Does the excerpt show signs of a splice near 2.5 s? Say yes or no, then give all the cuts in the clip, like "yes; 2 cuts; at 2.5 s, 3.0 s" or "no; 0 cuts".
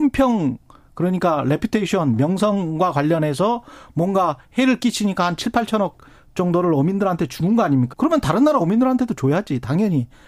no; 1 cut; at 7.9 s